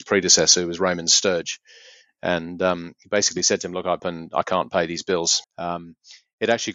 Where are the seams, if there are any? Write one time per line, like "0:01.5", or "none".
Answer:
0:04.0
0:05.4